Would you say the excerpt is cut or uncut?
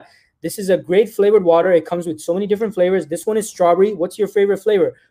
uncut